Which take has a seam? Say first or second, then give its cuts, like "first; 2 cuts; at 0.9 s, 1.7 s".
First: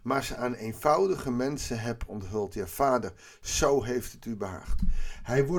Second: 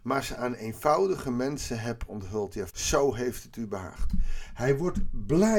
second; 1 cut; at 2.7 s